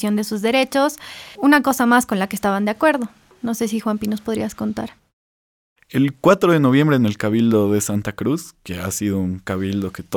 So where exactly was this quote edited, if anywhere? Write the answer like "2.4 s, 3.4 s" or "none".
1.4 s